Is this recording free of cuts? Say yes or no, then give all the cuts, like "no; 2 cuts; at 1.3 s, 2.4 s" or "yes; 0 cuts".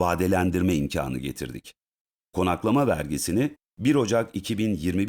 yes; 0 cuts